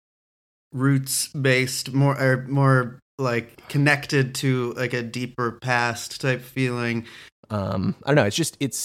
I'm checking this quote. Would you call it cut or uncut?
cut